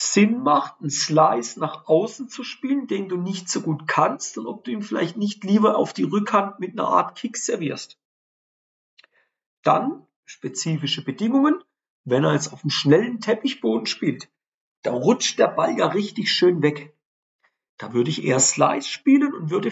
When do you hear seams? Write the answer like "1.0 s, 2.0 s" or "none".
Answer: none